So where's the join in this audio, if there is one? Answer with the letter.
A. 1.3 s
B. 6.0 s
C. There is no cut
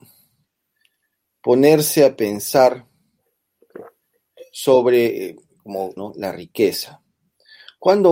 B